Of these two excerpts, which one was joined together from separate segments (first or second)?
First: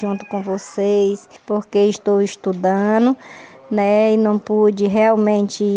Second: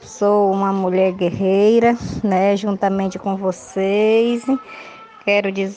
first